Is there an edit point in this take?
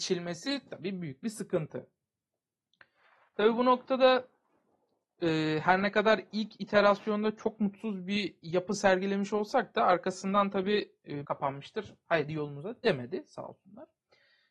yes; 1 cut; at 11.2 s

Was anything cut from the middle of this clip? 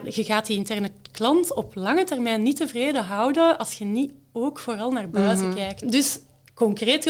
yes; 1 cut; at 5.8 s

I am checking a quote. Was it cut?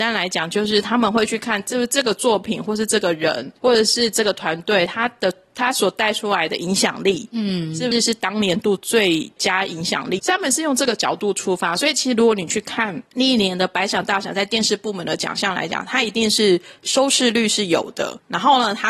yes; 2 cuts; at 7.9 s, 10.2 s

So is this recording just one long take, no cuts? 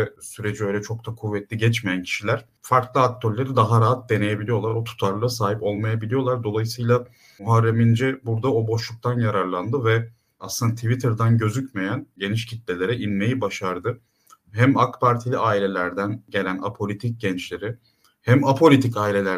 yes; 0 cuts

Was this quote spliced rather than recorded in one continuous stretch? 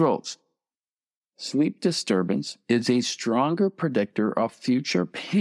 yes; 1 cut; at 1.2 s

